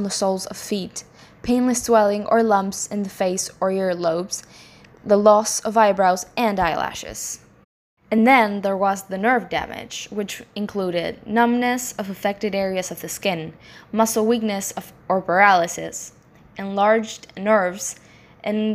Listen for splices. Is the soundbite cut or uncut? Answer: uncut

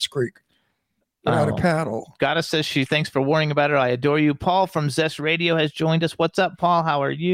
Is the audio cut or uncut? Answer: cut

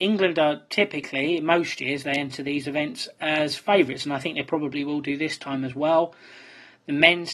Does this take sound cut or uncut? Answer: uncut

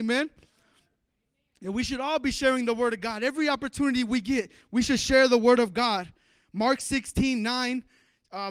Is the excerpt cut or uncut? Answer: uncut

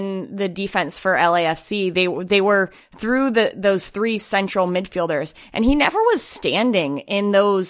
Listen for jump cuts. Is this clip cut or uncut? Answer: uncut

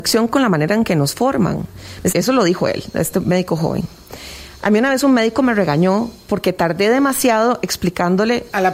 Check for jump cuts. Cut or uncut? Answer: cut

